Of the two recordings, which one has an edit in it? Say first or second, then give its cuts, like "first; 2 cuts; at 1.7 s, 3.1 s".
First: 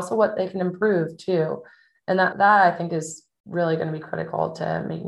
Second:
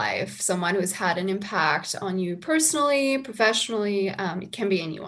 first; 1 cut; at 2.3 s